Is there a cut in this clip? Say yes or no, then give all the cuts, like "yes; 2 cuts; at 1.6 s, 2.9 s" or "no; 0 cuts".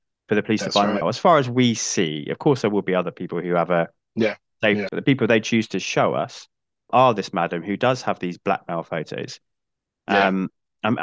yes; 3 cuts; at 1.0 s, 4.9 s, 6.9 s